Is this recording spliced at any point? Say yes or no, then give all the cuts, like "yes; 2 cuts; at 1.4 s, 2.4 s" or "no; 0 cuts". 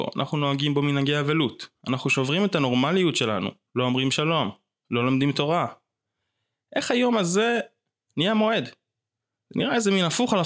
no; 0 cuts